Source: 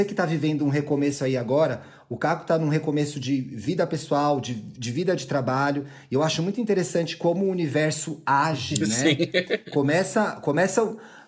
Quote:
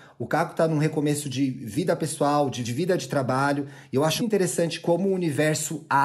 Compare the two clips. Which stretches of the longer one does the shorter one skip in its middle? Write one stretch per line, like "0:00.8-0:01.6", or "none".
0:04.5-0:04.8
0:06.4-0:06.5